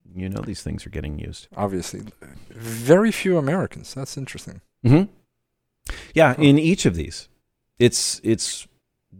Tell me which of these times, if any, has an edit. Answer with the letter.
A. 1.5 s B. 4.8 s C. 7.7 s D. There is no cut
A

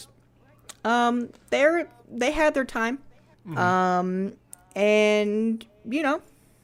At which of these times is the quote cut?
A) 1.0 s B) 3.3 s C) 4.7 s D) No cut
B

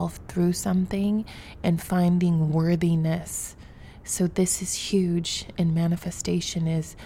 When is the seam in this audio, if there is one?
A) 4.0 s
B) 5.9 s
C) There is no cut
C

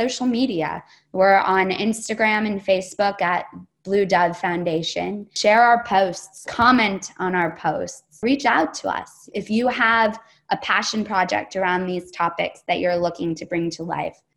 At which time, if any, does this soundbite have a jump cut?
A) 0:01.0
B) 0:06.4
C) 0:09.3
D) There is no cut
B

